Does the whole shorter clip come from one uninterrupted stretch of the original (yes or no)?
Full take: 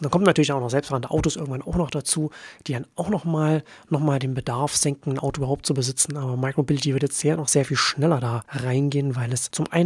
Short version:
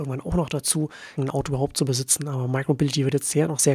no